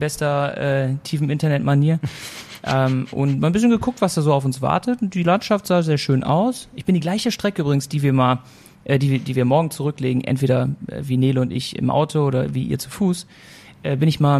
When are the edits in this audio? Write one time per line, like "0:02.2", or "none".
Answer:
none